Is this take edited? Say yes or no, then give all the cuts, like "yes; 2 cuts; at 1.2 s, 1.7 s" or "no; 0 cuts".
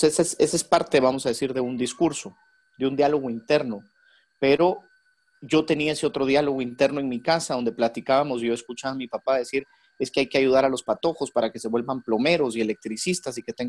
no; 0 cuts